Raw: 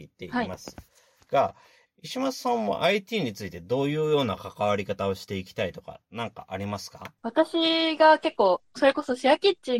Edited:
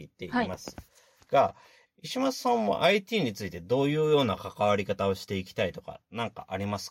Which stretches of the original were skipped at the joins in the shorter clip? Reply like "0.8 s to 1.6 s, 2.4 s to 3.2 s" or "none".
none